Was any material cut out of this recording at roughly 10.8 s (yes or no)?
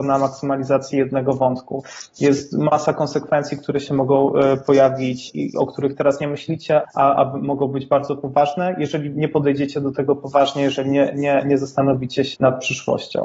no